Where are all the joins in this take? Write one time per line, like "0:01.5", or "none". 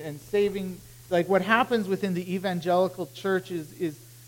0:01.1

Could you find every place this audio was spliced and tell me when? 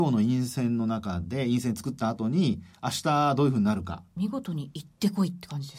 0:04.2

